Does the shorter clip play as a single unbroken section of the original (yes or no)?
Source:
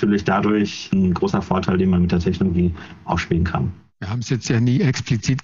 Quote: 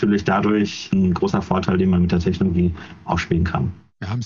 yes